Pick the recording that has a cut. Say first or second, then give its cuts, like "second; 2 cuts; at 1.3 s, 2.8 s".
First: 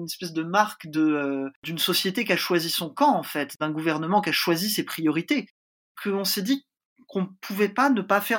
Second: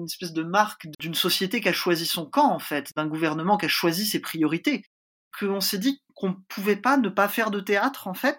second; 2 cuts; at 0.9 s, 6.1 s